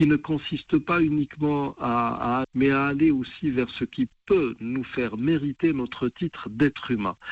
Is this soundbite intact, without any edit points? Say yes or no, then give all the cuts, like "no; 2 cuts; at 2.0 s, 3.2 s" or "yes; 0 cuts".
no; 1 cut; at 2.4 s